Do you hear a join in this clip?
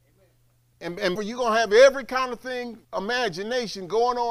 yes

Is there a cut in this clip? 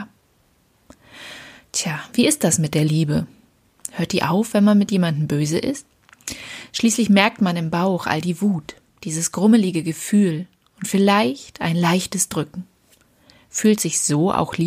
no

